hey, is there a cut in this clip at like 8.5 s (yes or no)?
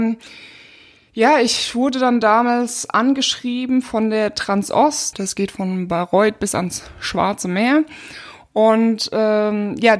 no